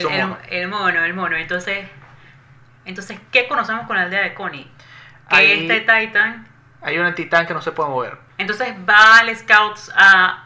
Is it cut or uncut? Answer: cut